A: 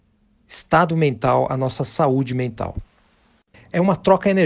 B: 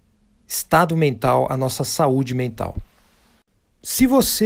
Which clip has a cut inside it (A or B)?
A